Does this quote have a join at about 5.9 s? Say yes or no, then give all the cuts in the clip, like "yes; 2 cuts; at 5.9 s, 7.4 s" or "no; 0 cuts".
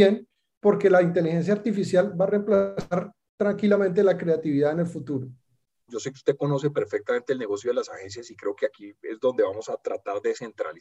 yes; 1 cut; at 5.9 s